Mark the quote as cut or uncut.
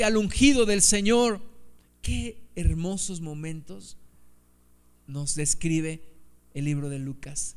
cut